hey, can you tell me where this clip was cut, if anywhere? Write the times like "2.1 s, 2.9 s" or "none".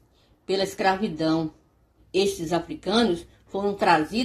2.0 s